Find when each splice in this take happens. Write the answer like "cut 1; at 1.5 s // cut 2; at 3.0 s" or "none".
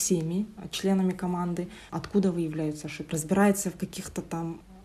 cut 1; at 1.9 s // cut 2; at 3.1 s